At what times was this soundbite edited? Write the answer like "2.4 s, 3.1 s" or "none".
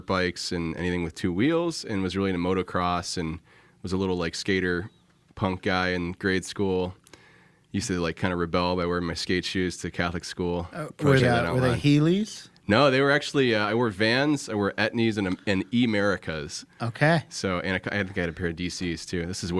11.2 s

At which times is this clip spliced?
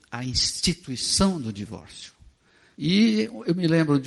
2.7 s

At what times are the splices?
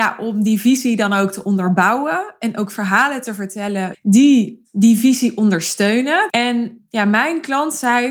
3.9 s, 6.3 s

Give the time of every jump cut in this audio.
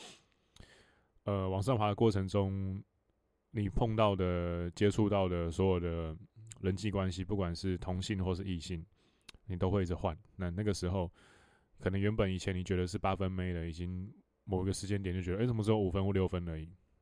none

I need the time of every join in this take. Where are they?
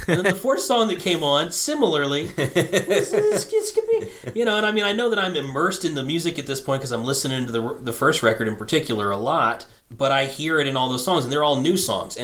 none

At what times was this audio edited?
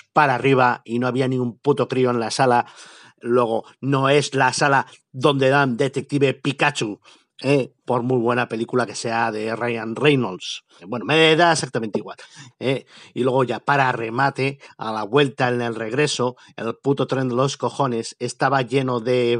10.8 s, 12.5 s

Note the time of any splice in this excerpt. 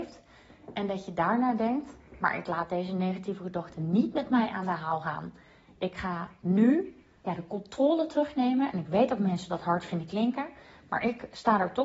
7.2 s

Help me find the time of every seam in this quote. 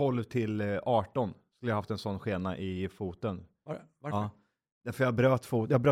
none

